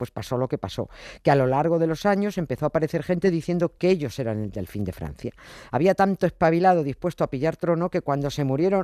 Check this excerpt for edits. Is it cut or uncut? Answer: uncut